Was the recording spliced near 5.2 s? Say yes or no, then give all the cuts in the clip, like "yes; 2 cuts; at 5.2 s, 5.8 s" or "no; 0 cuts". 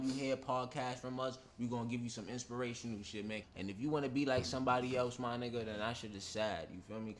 no; 1 cut; at 3.4 s